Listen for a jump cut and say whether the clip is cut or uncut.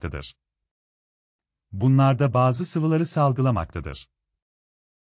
uncut